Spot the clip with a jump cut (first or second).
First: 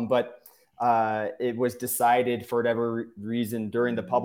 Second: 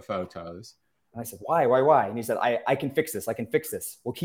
second